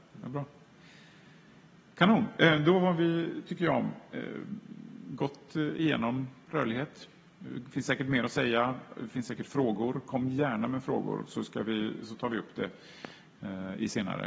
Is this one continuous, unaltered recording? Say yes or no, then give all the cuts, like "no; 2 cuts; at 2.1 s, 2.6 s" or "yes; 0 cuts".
yes; 0 cuts